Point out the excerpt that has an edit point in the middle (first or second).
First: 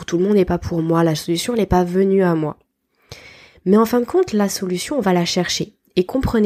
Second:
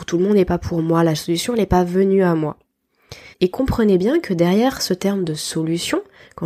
second